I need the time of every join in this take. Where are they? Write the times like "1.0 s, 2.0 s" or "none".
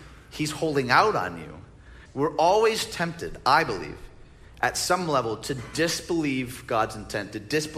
2.1 s